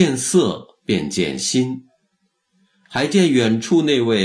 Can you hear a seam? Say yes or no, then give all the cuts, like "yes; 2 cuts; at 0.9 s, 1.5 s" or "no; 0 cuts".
no; 0 cuts